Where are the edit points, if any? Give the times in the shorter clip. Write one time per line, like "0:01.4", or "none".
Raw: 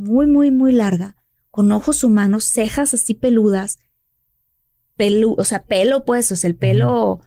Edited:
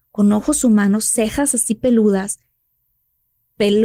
none